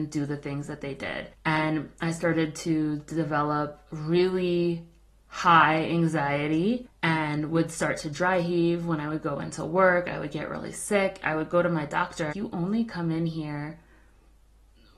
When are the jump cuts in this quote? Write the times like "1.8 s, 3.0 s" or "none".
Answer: 12.3 s